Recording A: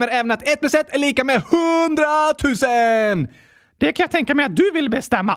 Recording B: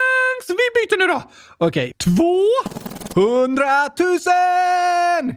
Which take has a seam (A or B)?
B